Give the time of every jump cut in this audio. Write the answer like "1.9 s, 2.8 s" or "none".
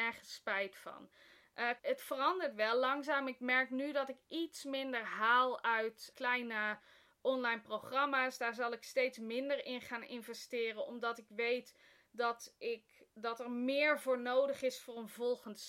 1.8 s, 6.1 s